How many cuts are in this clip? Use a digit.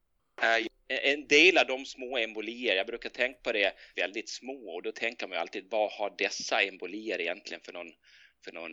1